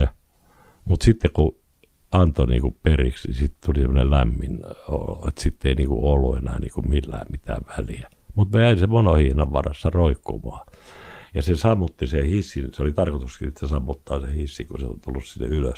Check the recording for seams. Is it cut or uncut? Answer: cut